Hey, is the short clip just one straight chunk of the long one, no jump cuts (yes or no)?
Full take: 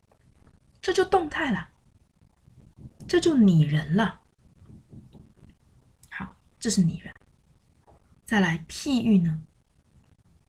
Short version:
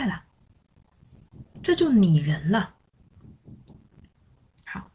yes